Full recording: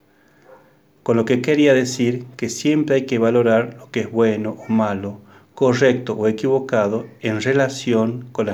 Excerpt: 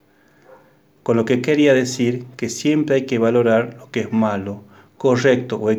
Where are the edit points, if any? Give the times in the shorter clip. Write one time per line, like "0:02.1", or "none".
0:04.1